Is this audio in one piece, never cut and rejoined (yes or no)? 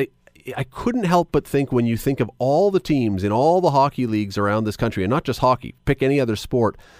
yes